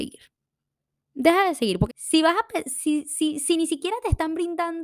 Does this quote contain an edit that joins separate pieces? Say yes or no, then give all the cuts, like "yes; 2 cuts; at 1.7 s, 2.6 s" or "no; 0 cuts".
yes; 1 cut; at 1.9 s